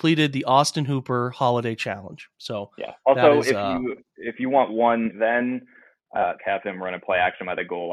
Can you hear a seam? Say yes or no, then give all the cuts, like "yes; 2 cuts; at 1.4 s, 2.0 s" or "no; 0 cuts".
yes; 2 cuts; at 5.1 s, 6.4 s